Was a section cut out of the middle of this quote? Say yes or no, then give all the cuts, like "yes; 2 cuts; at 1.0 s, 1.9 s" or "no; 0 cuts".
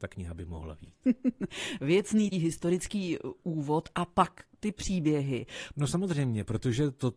yes; 2 cuts; at 2.3 s, 5.7 s